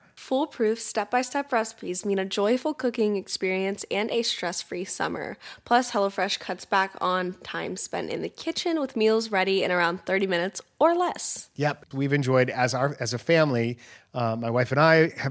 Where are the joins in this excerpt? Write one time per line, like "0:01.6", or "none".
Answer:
0:11.9